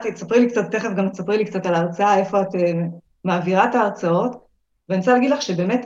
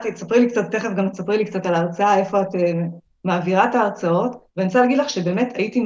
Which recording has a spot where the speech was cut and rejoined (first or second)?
second